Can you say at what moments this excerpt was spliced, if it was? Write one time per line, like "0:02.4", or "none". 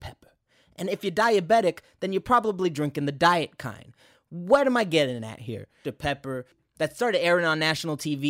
0:05.8